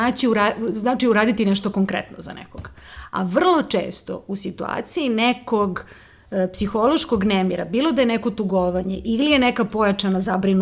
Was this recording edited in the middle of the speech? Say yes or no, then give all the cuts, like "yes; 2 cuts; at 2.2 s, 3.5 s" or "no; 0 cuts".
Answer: no; 0 cuts